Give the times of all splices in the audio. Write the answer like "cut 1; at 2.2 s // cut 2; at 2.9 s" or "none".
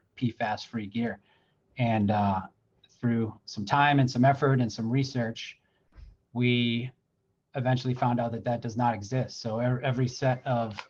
none